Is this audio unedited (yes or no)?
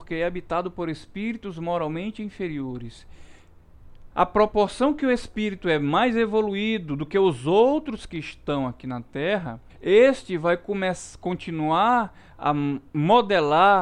no